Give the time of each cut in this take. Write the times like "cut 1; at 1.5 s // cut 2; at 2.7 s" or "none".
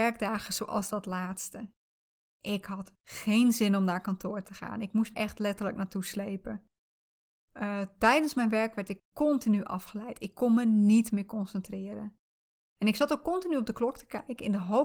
cut 1; at 5.1 s